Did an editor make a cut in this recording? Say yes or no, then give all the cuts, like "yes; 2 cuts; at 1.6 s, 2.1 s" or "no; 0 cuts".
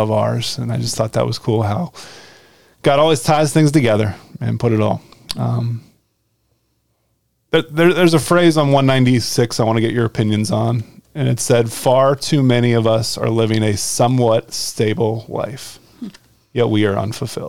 no; 0 cuts